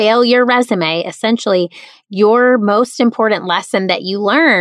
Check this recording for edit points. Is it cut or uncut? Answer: uncut